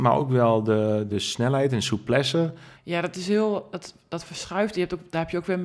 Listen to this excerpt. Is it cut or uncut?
cut